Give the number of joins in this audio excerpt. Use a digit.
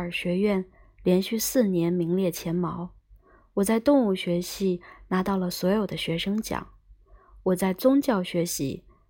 0